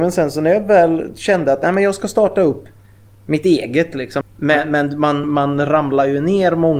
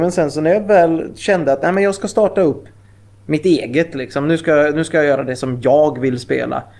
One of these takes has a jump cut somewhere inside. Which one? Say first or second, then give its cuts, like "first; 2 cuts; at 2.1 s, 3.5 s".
first; 2 cuts; at 4.2 s, 5.2 s